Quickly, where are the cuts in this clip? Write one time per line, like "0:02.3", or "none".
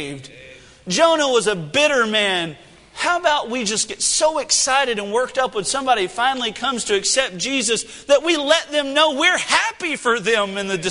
none